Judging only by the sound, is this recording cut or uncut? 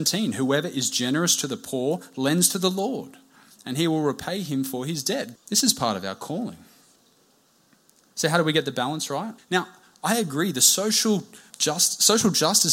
cut